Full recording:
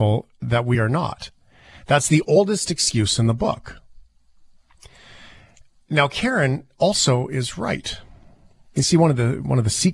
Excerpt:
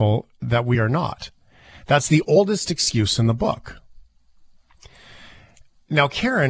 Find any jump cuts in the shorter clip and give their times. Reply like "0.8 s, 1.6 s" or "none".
none